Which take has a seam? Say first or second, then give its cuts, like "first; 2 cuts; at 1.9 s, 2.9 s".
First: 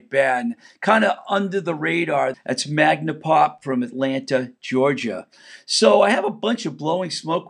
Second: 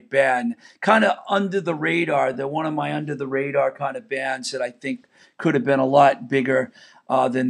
first; 1 cut; at 2.3 s